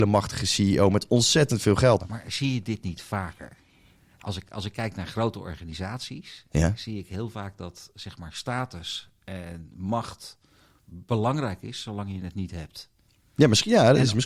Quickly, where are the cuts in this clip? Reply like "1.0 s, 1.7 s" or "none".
2.0 s